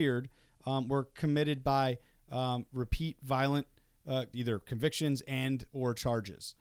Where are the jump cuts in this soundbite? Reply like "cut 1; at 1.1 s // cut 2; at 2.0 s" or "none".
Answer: cut 1; at 4.3 s